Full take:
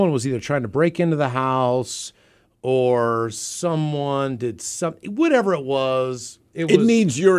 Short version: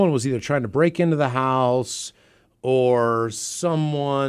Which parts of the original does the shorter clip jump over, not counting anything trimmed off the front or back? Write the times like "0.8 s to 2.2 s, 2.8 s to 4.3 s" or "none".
none